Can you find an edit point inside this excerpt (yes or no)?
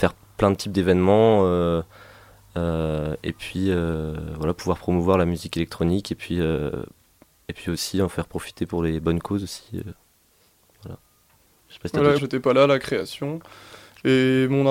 yes